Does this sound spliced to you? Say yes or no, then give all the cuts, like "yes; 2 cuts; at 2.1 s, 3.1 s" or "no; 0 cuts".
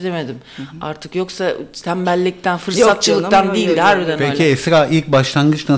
no; 0 cuts